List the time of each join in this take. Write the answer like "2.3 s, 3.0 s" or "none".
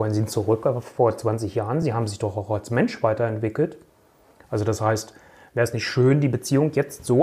none

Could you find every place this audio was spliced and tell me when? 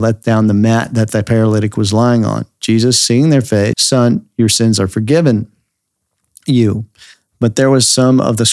3.7 s

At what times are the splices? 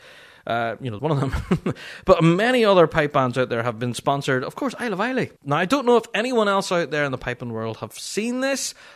1.0 s, 5.4 s

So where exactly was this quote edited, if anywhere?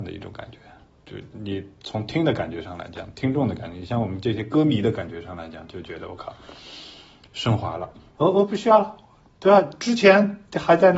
1.0 s, 8.2 s

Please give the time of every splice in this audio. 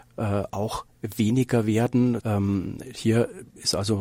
2.2 s

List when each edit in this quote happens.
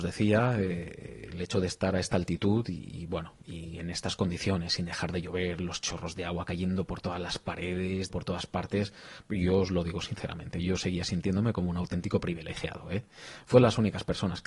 8.1 s, 13.5 s

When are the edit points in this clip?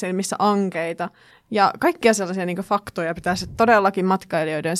1.3 s

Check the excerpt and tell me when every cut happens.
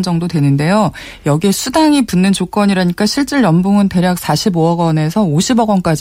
none

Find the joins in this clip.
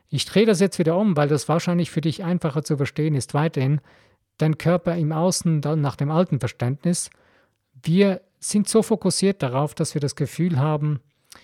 none

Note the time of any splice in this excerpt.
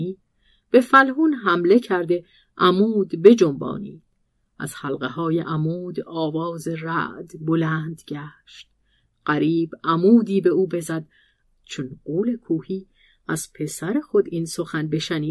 9.1 s, 11.4 s

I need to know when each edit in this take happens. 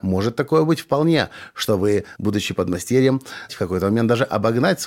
2.1 s, 3.5 s

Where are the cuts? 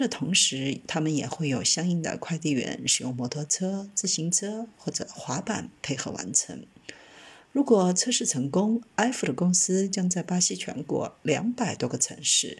none

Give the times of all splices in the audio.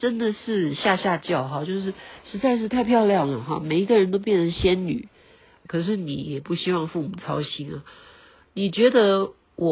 5.6 s

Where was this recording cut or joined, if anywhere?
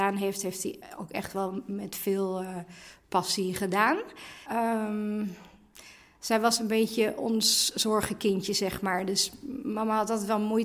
4.5 s

